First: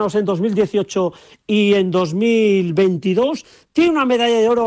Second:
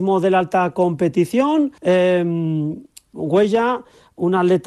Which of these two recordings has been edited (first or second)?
second